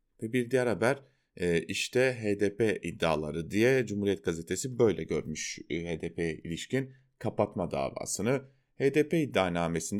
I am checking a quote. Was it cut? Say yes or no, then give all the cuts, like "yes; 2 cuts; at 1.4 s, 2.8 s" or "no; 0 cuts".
no; 0 cuts